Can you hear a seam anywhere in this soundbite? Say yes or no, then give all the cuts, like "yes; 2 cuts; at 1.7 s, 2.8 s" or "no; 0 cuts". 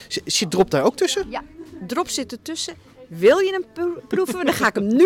no; 0 cuts